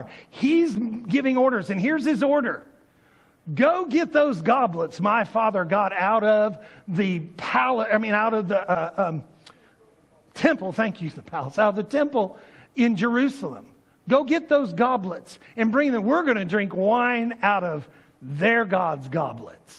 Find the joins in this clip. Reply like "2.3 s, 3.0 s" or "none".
none